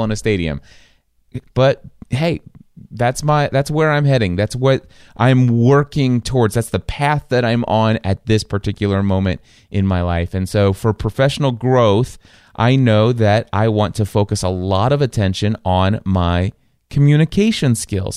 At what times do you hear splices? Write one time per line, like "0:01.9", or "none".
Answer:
0:01.5